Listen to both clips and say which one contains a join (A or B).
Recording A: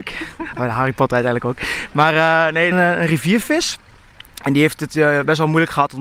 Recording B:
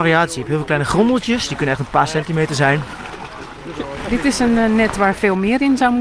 A